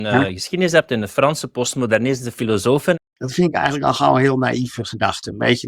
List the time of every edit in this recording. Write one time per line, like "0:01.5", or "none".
0:02.9